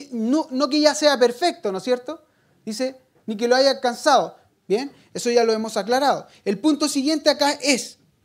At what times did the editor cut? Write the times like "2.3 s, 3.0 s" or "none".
4.5 s